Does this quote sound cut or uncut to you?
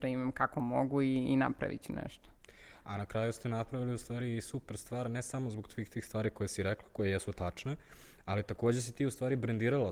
uncut